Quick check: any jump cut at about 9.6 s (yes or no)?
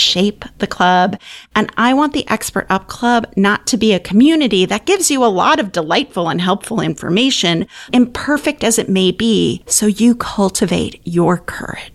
no